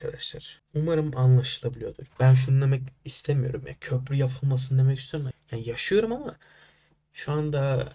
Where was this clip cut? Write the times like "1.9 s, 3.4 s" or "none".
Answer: 5.3 s

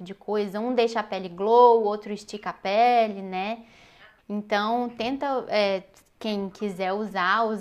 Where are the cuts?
4.2 s

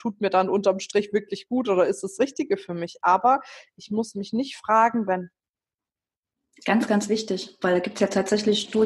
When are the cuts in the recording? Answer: 5.0 s

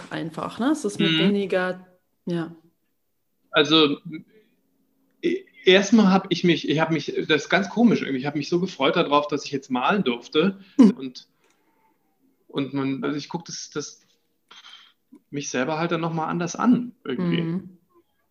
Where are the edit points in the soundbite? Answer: 3.4 s, 10.9 s, 13.0 s

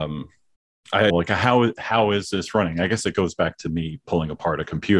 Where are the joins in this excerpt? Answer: 1.1 s

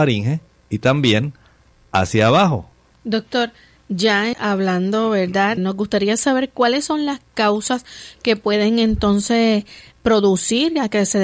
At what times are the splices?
2.9 s, 4.3 s, 5.6 s

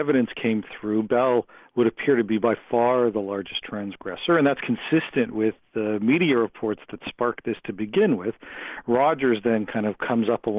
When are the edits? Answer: none

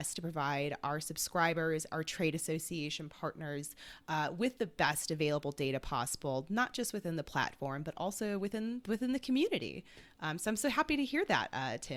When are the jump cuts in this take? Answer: none

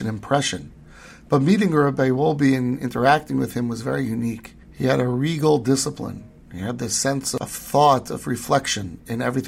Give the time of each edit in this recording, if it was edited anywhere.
4.6 s

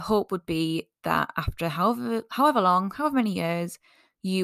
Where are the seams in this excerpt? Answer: none

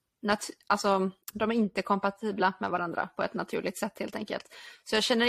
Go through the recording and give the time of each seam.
1.2 s

